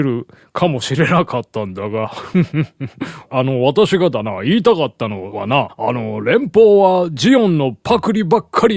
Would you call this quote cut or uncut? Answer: uncut